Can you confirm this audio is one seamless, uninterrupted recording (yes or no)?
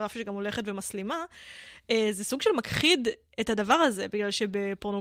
yes